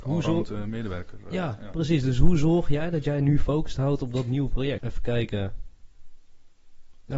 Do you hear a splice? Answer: yes; 1 cut; at 4.8 s

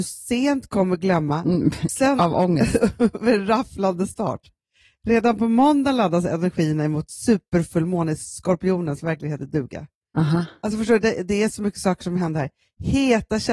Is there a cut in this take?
yes; 1 cut; at 1.9 s

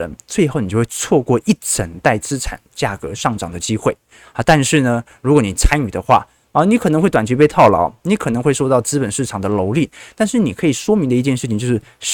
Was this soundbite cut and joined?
no; 0 cuts

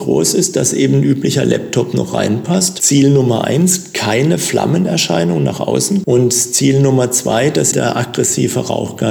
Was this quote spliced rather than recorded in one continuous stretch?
yes; 1 cut; at 7.7 s

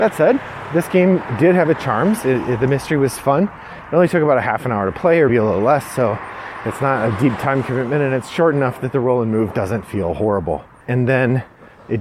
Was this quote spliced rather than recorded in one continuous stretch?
yes; 2 cuts; at 5.3 s, 10.8 s

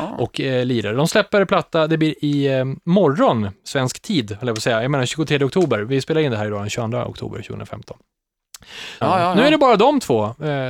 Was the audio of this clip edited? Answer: yes; 1 cut; at 9.0 s

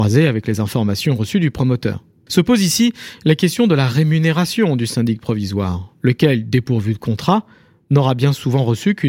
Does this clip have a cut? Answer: yes; 1 cut; at 2.3 s

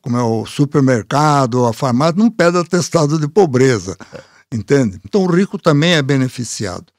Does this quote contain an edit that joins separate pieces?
yes; 1 cut; at 5.0 s

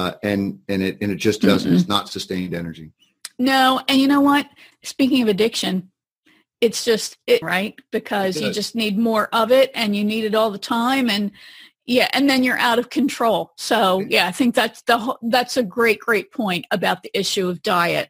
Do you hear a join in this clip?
yes; 1 cut; at 7.4 s

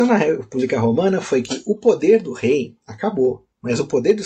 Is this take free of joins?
yes; 0 cuts

